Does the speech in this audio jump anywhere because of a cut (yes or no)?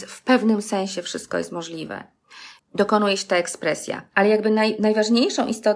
yes